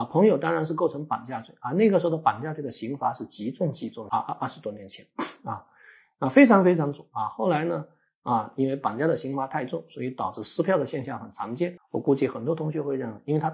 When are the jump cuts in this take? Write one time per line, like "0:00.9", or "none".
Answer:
0:04.1
0:11.8